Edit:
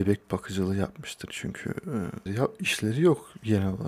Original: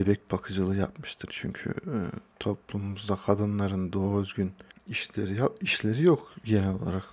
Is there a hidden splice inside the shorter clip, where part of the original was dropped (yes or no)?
yes